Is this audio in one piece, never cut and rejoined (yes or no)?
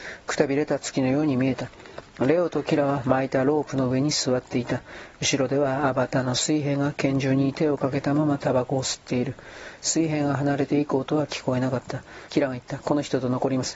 no